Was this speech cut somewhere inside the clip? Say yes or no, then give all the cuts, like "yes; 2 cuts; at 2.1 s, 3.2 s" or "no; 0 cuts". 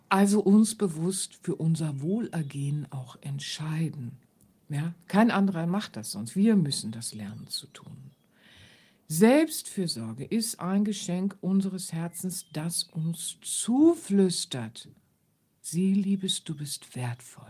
no; 0 cuts